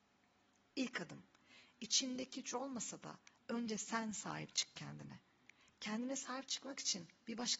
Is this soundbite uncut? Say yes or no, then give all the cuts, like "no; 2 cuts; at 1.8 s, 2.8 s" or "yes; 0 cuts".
yes; 0 cuts